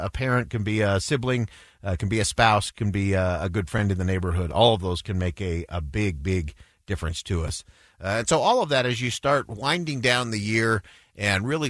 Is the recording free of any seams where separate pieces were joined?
yes; 0 cuts

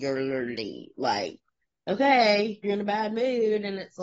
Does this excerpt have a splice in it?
yes; 1 cut; at 2.6 s

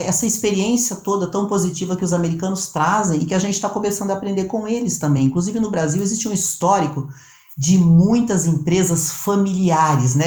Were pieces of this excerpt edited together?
no; 0 cuts

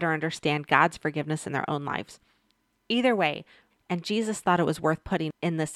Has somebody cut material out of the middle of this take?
yes; 1 cut; at 3.7 s

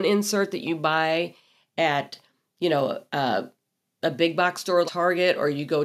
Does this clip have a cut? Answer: yes; 1 cut; at 4.9 s

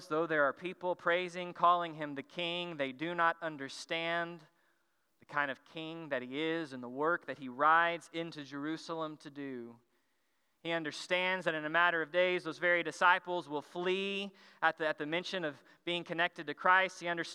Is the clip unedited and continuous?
yes; 0 cuts

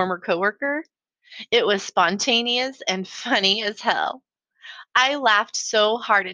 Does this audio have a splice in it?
yes; 1 cut; at 2.8 s

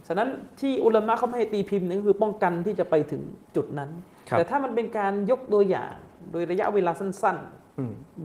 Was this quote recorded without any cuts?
no; 1 cut; at 3.5 s

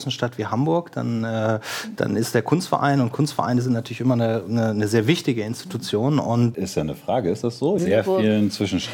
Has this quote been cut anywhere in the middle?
yes; 2 cuts; at 6.5 s, 7.8 s

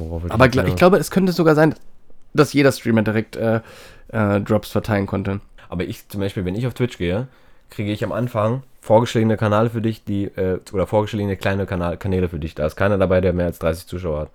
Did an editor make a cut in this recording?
yes; 1 cut; at 5.6 s

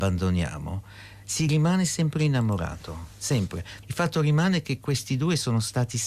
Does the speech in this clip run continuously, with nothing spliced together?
no; 1 cut; at 3.8 s

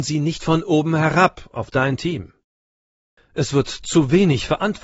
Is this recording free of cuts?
no; 1 cut; at 3.2 s

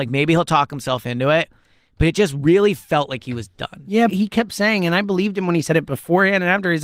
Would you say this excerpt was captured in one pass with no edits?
no; 1 cut; at 4.1 s

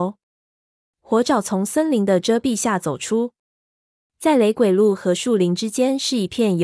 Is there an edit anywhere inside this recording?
no; 0 cuts

